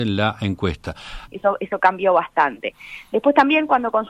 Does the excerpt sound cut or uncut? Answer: cut